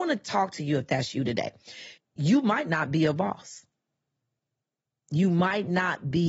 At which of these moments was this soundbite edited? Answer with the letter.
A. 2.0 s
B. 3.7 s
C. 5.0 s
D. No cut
A